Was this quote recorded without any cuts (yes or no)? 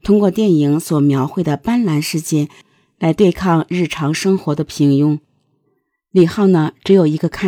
yes